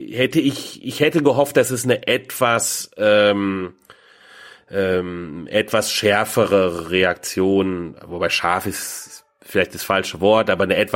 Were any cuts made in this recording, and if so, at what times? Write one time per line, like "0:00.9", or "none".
none